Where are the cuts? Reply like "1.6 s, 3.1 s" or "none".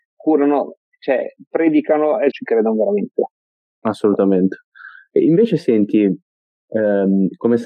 2.3 s